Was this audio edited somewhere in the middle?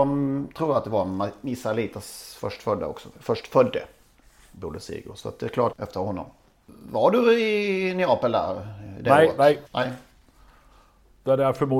yes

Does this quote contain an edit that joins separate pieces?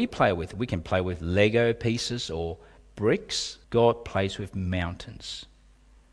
yes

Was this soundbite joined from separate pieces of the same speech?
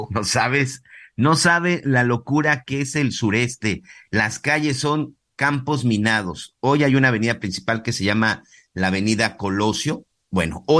no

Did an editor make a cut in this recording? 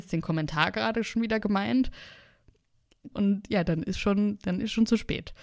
yes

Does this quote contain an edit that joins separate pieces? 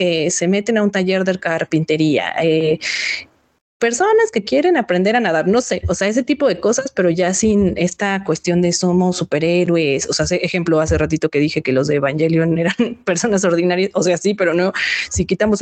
no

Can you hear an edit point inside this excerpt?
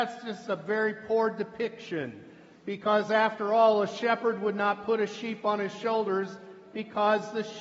no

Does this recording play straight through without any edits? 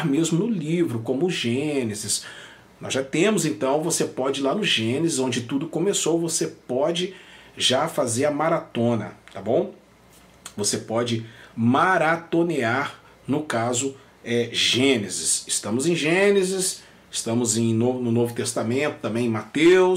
yes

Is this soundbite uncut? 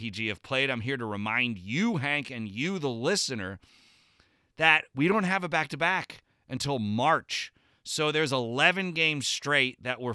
yes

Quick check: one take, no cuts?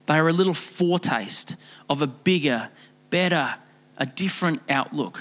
no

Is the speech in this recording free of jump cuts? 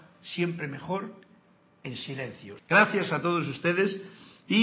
no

